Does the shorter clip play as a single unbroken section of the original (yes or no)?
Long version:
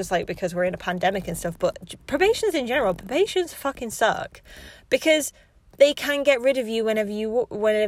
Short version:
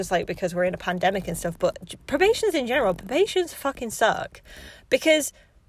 yes